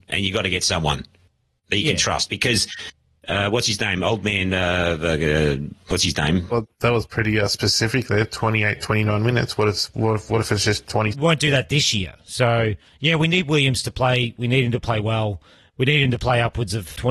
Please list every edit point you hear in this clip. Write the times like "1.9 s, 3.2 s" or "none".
6.5 s, 11.1 s